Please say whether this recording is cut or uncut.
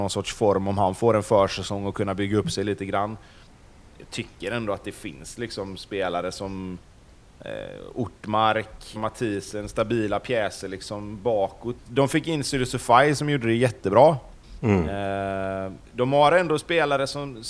cut